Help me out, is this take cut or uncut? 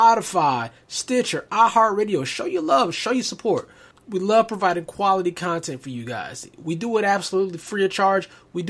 uncut